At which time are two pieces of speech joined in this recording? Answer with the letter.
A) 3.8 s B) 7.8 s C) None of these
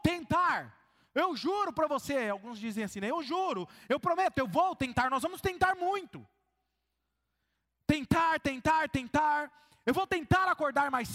C